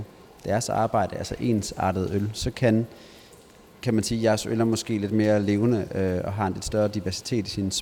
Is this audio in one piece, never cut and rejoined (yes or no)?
yes